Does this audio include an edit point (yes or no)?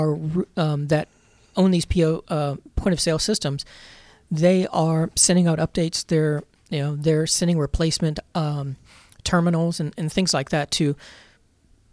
no